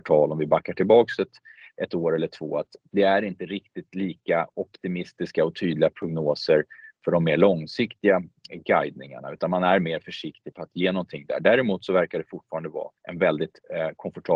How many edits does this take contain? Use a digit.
2